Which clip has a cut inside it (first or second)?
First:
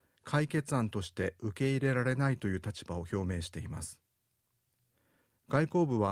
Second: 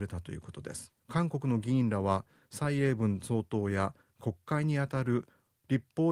second